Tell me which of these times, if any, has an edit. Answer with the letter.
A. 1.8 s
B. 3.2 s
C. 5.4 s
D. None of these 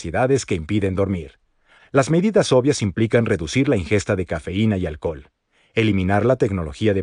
A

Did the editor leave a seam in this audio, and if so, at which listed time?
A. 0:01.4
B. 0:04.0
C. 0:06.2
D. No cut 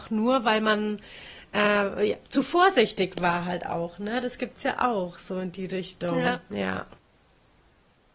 D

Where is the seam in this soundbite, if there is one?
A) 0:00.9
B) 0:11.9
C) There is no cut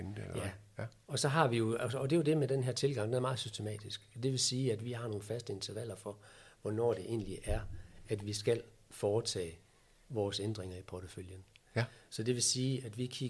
C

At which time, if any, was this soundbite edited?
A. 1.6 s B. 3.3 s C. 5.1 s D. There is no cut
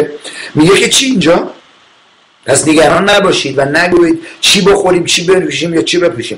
D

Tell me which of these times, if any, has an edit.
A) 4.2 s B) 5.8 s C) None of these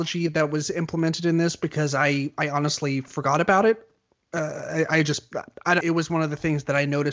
B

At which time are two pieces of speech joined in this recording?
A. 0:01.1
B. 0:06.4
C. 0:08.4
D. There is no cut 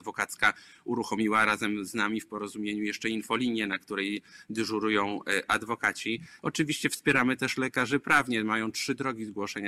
B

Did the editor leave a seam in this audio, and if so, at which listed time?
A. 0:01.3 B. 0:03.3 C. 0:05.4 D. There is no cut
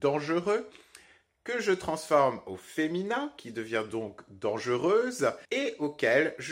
C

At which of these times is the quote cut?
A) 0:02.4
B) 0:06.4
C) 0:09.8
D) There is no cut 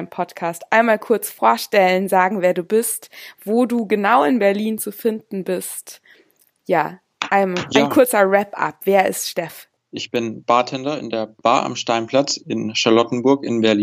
D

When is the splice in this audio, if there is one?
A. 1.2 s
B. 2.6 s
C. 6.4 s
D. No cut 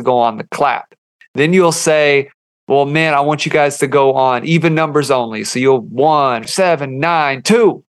C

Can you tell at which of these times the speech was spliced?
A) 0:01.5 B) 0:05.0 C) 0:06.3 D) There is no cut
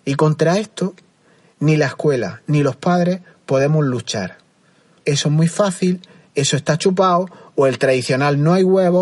B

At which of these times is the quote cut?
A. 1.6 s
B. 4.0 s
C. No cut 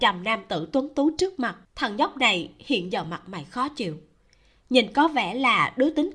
A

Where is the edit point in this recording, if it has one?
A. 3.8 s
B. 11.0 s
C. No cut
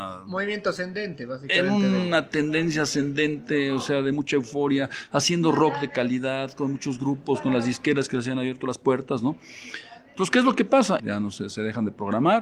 B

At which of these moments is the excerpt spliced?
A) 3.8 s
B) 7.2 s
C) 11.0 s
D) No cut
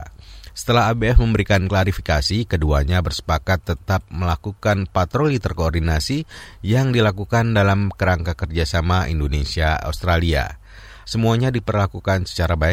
C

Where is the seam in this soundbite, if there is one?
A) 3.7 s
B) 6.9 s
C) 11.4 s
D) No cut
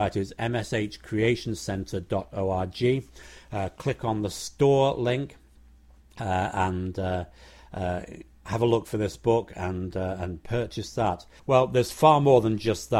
C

